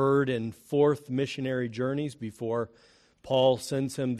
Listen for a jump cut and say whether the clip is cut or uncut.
uncut